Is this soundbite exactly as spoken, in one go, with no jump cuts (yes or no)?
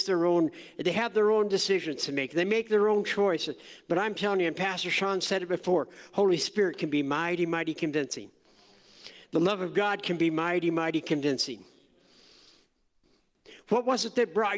yes